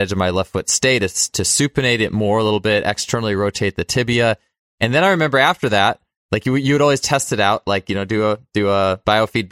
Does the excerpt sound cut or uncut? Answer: uncut